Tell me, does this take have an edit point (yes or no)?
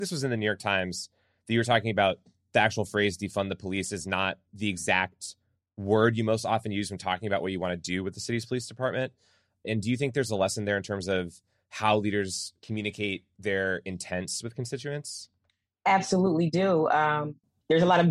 yes